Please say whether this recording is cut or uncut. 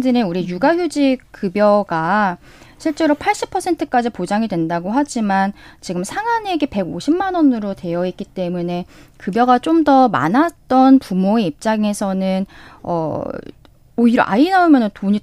uncut